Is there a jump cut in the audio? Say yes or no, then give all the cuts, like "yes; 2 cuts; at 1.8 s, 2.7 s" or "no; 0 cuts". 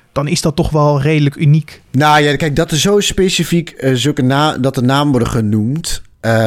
no; 0 cuts